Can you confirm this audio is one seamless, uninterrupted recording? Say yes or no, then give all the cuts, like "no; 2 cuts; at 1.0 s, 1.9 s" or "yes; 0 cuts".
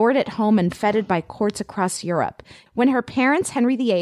no; 1 cut; at 2.7 s